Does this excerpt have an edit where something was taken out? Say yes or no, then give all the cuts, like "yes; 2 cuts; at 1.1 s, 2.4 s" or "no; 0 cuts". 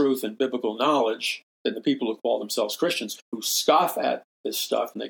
yes; 1 cut; at 1.5 s